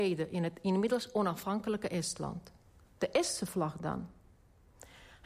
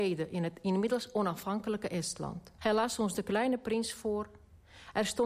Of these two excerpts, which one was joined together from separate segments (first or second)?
second